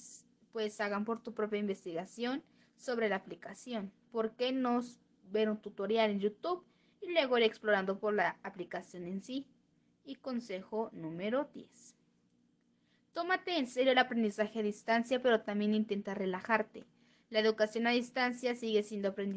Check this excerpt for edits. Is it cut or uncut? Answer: uncut